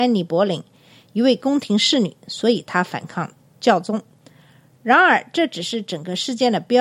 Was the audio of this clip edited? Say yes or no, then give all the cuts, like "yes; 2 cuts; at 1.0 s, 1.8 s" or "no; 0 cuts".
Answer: no; 0 cuts